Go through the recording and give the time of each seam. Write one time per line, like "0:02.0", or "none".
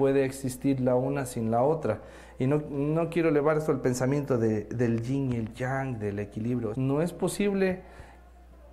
0:06.7